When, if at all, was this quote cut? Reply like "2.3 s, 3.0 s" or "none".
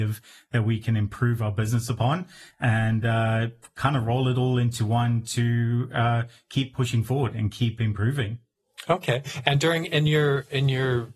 none

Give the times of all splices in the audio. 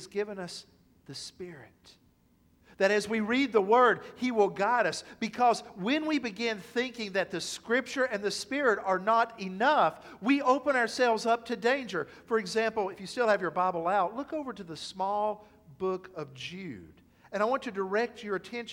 none

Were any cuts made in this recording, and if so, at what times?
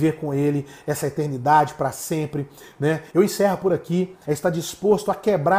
3.1 s, 4.2 s

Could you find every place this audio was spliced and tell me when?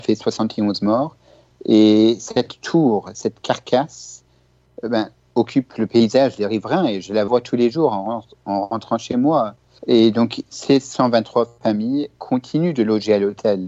1.5 s, 9.8 s

